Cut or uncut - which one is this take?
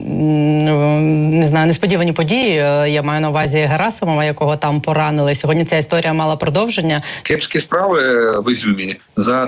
cut